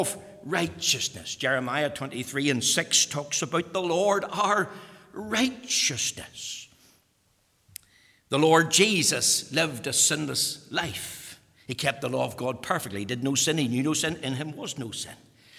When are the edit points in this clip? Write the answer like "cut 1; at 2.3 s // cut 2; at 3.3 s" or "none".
none